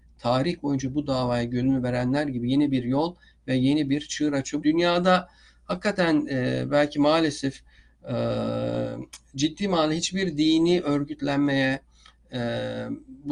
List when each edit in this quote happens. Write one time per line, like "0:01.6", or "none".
0:04.6